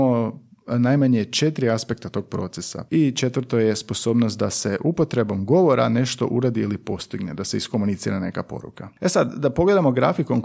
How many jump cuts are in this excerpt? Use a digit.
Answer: 1